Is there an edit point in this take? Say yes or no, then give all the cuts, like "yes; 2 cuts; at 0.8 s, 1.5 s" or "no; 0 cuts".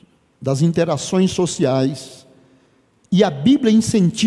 no; 0 cuts